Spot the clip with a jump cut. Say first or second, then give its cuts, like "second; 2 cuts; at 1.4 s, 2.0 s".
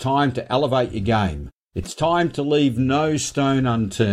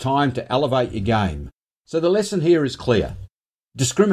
second; 1 cut; at 1.7 s